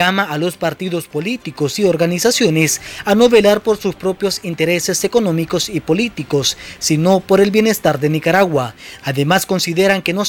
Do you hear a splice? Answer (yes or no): yes